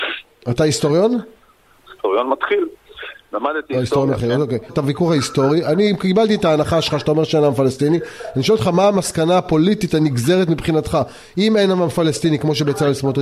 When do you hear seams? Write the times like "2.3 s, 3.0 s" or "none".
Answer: 4.7 s